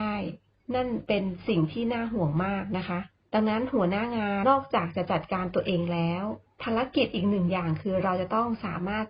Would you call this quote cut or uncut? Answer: cut